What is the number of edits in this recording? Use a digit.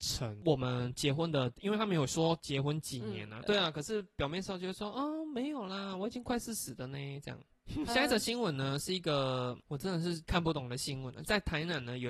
2